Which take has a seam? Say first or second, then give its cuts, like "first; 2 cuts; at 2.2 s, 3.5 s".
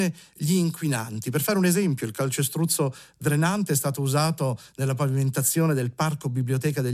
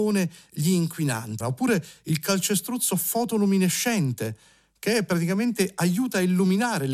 second; 1 cut; at 1.4 s